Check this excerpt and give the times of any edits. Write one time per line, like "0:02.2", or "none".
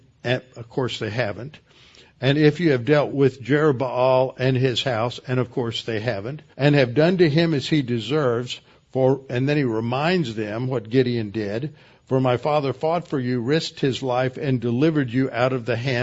0:03.1
0:06.5